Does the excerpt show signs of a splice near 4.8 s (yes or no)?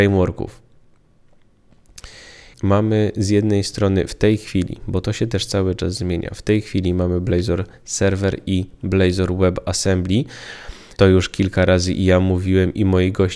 no